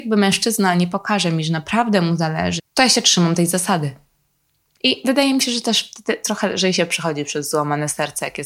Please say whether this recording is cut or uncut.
cut